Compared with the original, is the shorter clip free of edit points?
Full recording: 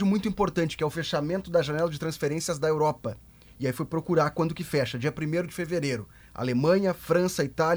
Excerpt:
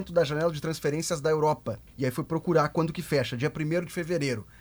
no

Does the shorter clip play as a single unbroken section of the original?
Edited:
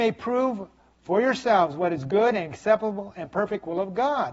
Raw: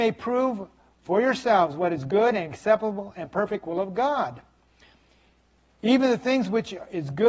yes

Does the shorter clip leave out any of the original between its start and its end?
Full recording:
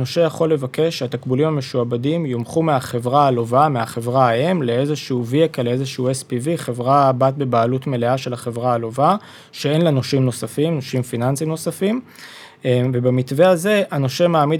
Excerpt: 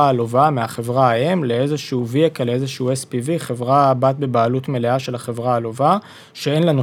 no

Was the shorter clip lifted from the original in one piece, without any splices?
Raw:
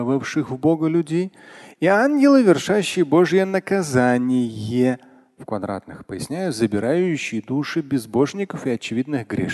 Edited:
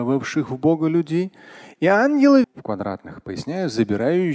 no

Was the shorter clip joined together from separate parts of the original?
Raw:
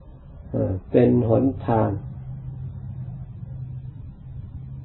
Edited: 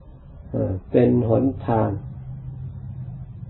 no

